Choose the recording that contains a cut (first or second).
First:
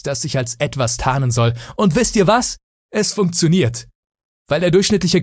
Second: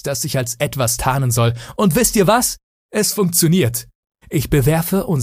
second